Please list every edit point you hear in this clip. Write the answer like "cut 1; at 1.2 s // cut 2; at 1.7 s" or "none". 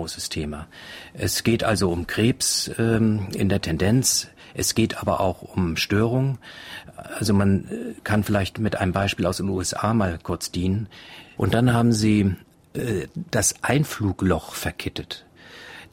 cut 1; at 11.4 s